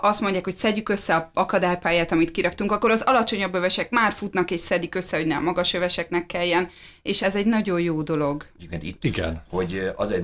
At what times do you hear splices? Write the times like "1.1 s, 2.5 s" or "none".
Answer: 7.2 s, 9.0 s

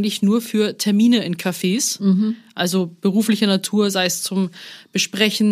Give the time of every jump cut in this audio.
none

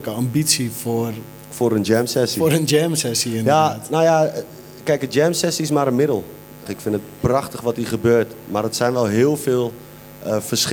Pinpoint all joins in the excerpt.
6.7 s

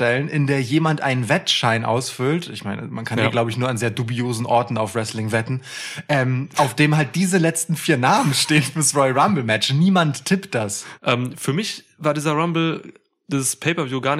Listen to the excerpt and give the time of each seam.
11.0 s

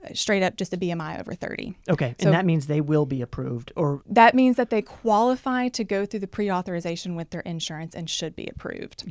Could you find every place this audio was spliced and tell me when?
1.8 s, 4.0 s

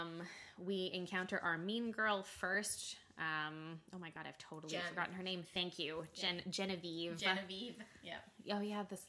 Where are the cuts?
none

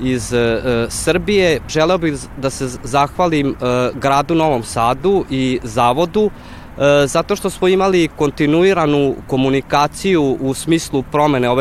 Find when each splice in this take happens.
1.7 s

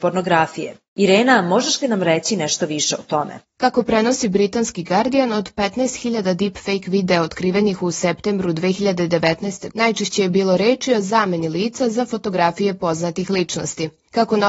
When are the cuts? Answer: 9.7 s

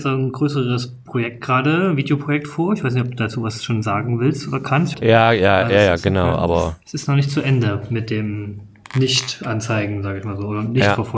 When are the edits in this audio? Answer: 4.9 s

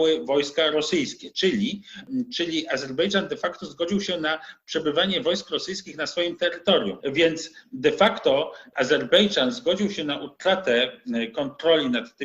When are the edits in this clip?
7.0 s

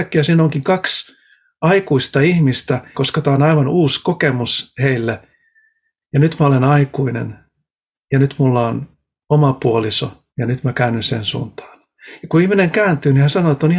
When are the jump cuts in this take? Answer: 2.9 s, 6.0 s, 10.3 s

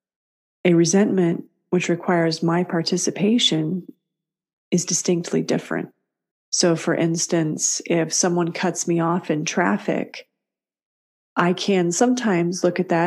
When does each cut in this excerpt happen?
6.3 s

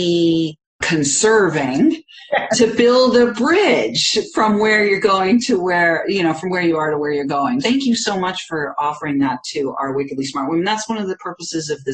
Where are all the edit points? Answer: 7.6 s

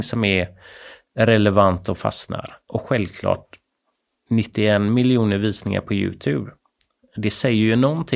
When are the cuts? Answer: none

